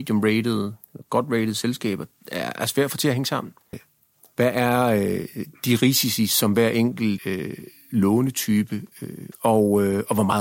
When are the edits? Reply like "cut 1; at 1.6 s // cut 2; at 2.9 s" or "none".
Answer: cut 1; at 3.7 s // cut 2; at 7.2 s // cut 3; at 9.3 s